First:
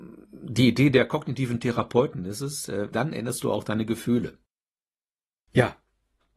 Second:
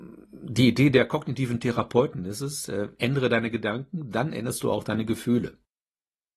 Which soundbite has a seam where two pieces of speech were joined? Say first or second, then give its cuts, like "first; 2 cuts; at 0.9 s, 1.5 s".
first; 1 cut; at 2.9 s